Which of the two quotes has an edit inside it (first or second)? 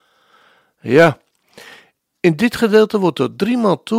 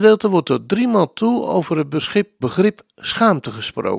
second